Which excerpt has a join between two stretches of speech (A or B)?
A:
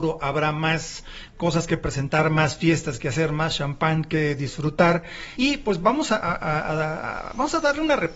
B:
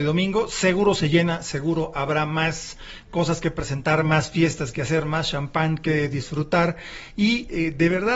A